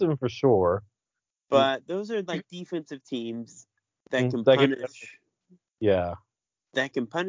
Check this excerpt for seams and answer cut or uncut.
uncut